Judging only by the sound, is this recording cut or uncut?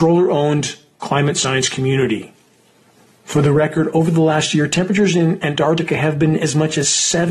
uncut